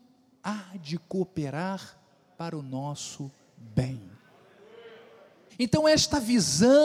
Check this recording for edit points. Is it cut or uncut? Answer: cut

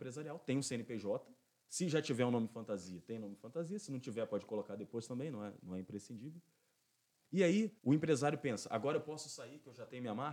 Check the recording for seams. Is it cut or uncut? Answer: cut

